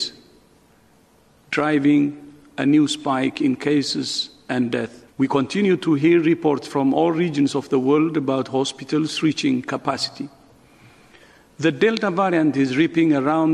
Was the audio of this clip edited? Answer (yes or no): yes